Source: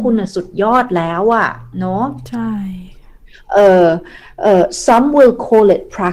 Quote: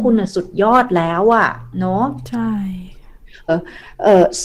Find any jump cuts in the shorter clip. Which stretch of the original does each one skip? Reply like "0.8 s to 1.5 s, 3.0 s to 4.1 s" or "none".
3.5 s to 3.9 s